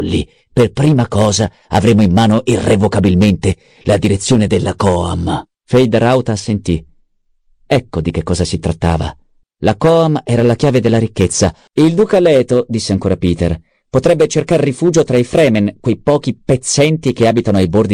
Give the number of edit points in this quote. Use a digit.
3